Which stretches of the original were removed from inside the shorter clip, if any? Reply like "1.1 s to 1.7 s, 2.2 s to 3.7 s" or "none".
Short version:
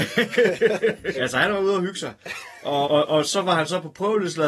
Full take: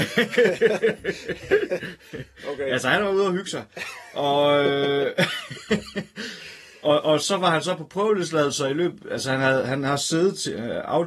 1.1 s to 2.7 s, 4.4 s to 6.8 s